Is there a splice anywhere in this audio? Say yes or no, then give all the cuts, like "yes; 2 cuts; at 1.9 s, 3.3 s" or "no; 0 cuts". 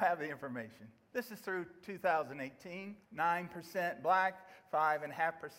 yes; 1 cut; at 3.0 s